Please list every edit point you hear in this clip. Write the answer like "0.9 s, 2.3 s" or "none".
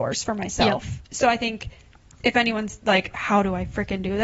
none

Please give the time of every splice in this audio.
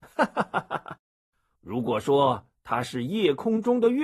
1.6 s

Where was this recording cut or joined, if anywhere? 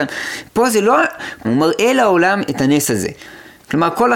1.4 s

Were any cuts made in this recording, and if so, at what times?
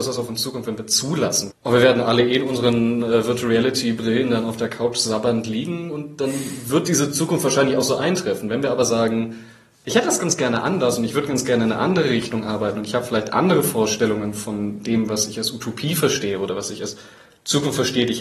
1.5 s

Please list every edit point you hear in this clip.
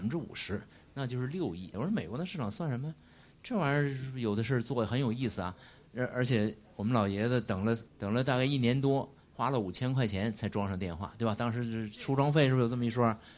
1.7 s, 7.9 s

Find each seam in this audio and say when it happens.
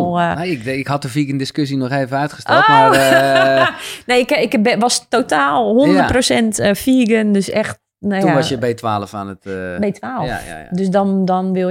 none

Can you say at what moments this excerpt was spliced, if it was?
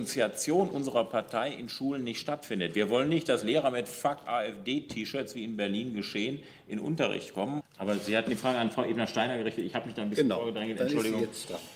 7.6 s

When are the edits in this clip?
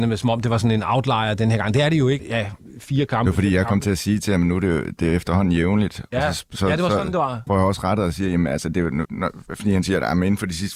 2.2 s, 7.5 s, 9.0 s

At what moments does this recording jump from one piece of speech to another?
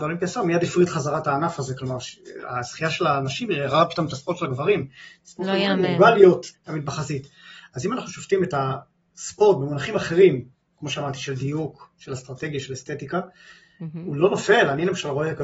6.5 s

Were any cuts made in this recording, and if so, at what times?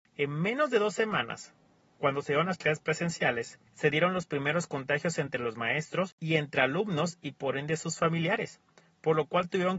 3.7 s, 6.1 s

